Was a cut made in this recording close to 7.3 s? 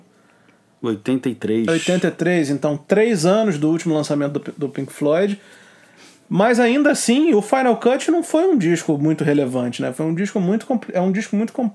no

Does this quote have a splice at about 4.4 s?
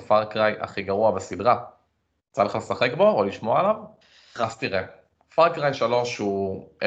yes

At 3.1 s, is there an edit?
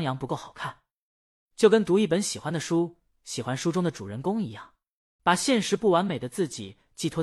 no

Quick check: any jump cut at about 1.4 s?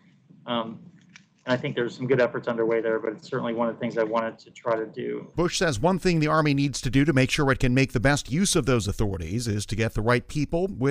no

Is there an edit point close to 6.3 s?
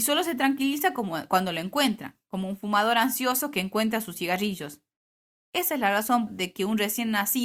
yes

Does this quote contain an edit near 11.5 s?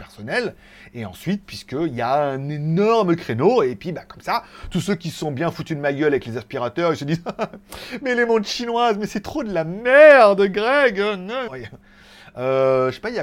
yes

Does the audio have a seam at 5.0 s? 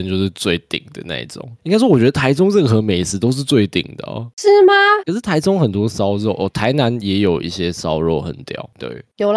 yes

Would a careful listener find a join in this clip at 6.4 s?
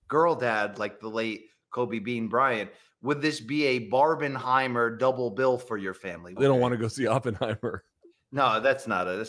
yes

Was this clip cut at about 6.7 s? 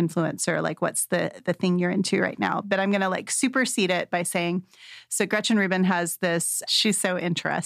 yes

